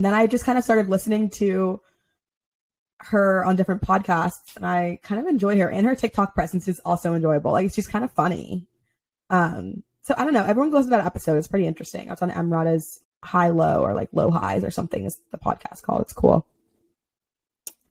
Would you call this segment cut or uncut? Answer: cut